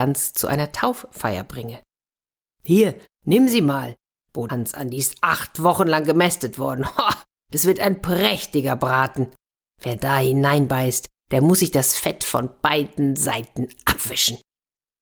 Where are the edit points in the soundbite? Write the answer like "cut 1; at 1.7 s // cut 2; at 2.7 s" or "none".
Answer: cut 1; at 4.5 s